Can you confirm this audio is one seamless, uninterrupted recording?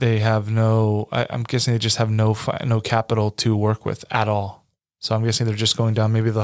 yes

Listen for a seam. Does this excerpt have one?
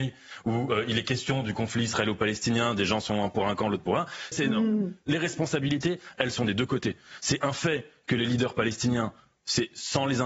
yes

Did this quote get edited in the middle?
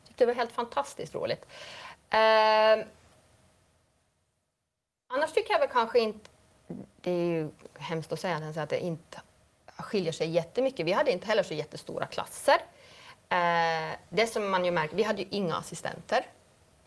no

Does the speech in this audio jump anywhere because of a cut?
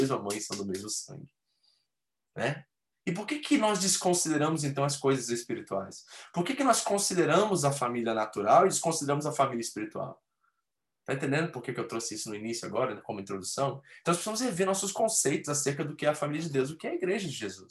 yes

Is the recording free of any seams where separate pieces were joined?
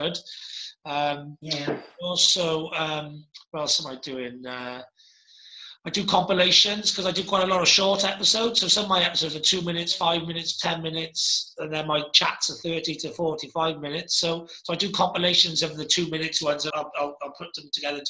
no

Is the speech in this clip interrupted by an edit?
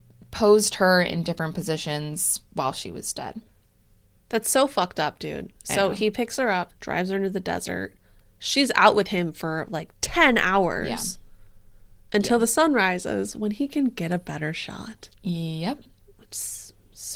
yes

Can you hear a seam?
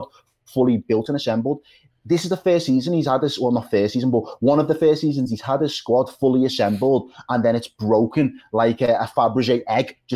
no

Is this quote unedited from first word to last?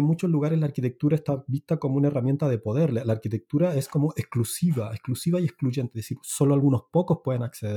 yes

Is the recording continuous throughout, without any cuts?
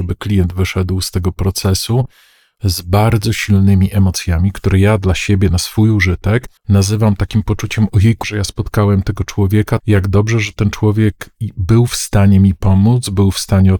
no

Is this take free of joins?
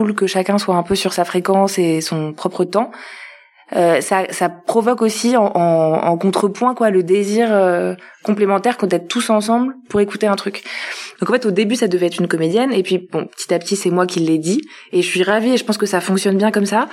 no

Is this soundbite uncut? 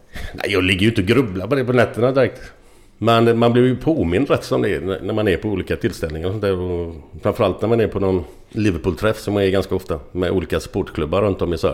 yes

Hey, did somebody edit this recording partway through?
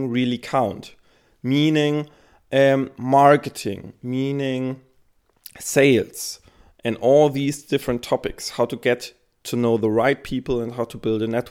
no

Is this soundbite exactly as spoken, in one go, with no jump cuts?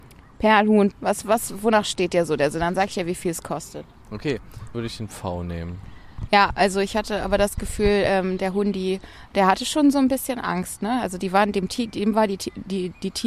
no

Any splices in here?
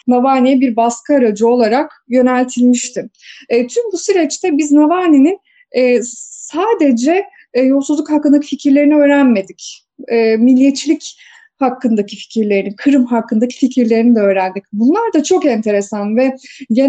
no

